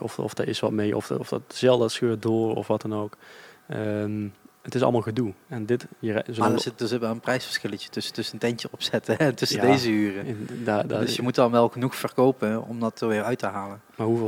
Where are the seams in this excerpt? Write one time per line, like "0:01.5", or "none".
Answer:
0:01.1